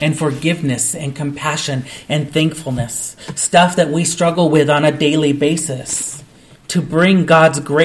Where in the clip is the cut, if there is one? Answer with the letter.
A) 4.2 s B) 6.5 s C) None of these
B